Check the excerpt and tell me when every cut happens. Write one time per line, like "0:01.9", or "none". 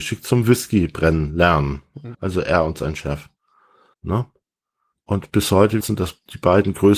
0:02.1
0:03.9
0:05.8

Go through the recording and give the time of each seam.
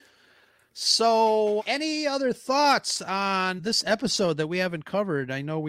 0:01.6
0:03.6

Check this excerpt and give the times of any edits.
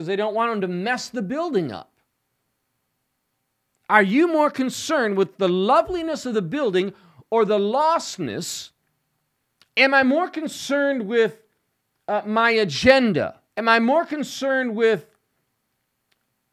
0:09.7
0:13.5

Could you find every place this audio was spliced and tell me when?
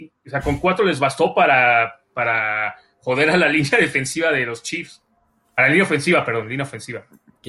none

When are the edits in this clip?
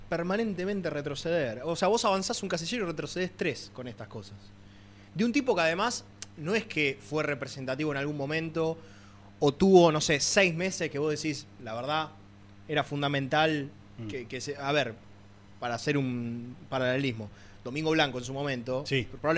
none

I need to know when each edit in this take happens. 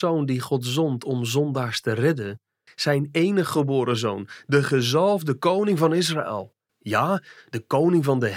0:02.7

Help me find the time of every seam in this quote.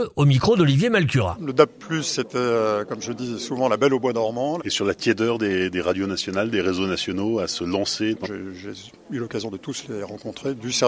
0:04.6
0:08.2

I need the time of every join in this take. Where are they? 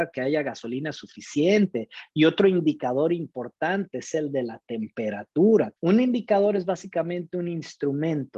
0:05.8

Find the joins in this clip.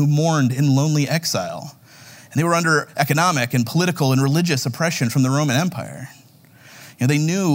none

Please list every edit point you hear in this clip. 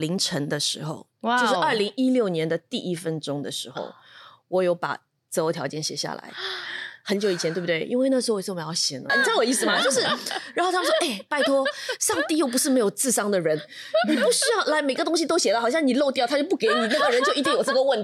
0:09.1

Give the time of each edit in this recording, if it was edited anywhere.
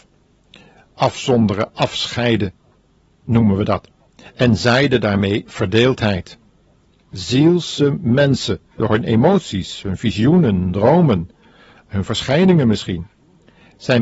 0:07.0

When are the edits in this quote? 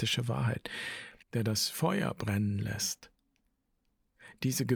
0:01.2

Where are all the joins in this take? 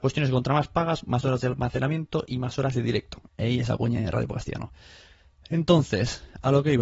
0:03.2

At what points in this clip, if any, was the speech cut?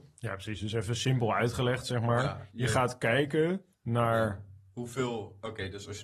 0:03.7

